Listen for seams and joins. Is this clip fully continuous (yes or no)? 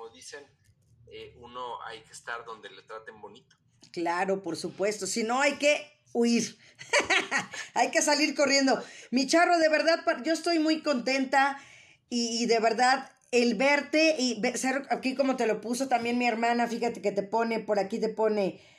yes